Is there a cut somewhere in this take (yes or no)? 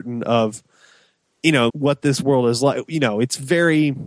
yes